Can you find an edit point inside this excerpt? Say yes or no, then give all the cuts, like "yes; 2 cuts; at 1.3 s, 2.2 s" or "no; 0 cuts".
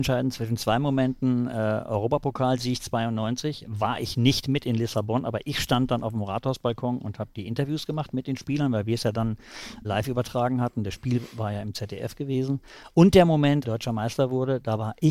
yes; 2 cuts; at 9.8 s, 13.6 s